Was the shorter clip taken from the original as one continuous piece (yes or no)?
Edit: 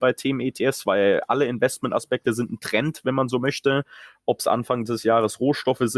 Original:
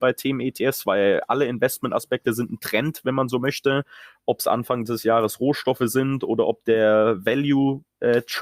yes